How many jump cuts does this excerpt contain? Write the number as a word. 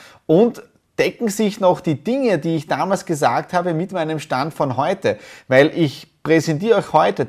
zero